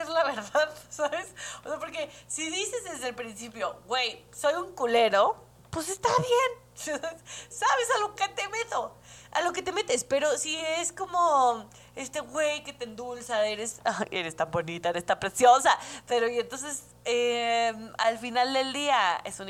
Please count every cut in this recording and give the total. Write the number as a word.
zero